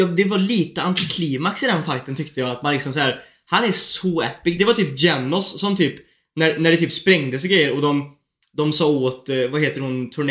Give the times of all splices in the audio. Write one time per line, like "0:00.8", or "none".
none